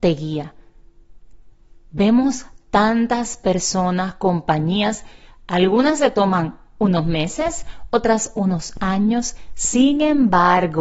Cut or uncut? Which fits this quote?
uncut